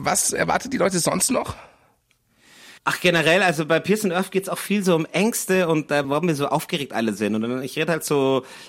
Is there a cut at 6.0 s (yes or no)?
yes